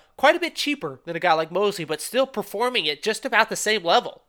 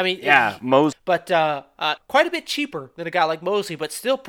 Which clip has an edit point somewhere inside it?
second; 2 cuts; at 0.9 s, 2.0 s

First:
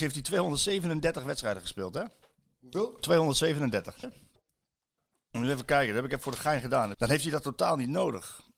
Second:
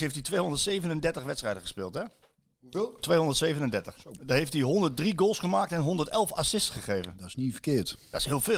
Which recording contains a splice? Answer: first; 2 cuts; at 4.0 s, 6.9 s

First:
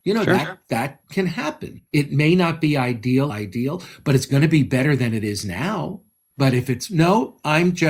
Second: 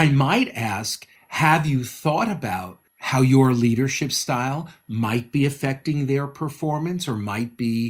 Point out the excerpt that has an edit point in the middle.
first; 2 cuts; at 3.3 s, 6.3 s

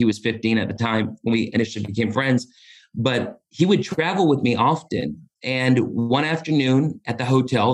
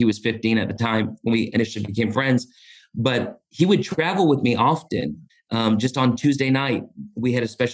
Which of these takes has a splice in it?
second; 1 cut; at 5.3 s

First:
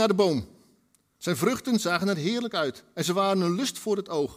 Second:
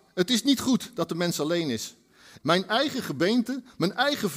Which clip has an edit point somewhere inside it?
second; 1 cut; at 2.4 s

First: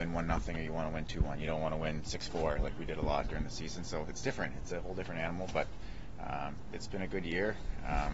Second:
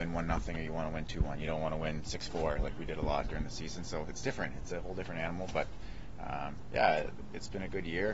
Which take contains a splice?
first; 1 cut; at 6.7 s

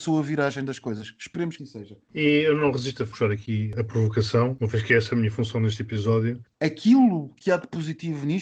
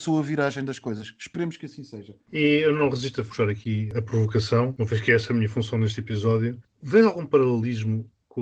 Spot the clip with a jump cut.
first; 2 cuts; at 1.6 s, 6.5 s

